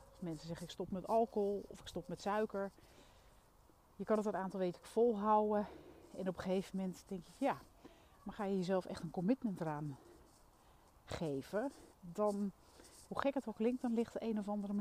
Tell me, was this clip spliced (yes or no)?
yes